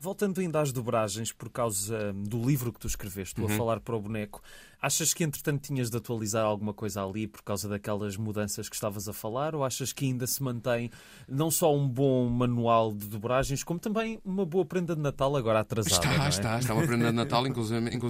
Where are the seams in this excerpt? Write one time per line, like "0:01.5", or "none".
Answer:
none